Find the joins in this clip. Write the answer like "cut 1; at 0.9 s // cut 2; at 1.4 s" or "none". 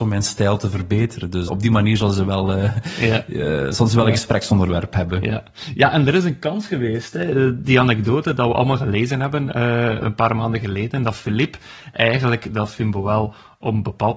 cut 1; at 1.5 s

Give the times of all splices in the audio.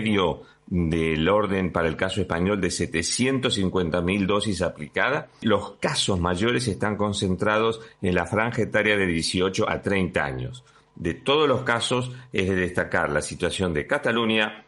cut 1; at 10.9 s

